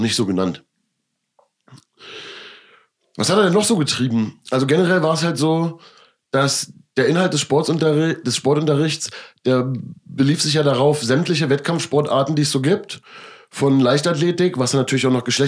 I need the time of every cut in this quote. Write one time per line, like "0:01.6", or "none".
none